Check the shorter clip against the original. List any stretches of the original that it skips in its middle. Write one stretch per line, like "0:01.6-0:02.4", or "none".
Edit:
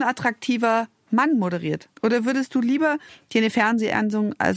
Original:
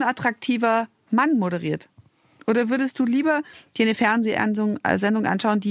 0:02.0-0:02.4